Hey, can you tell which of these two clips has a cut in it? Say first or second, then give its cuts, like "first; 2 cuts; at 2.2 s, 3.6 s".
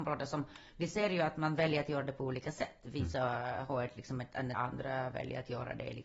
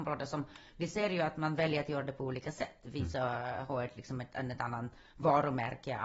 first; 1 cut; at 4.5 s